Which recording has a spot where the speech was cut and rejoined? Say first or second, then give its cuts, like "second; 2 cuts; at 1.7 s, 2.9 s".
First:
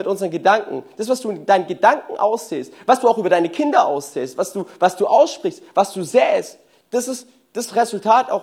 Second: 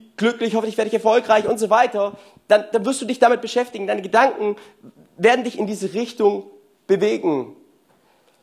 second; 1 cut; at 2.7 s